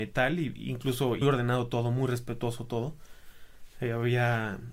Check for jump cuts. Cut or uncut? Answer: cut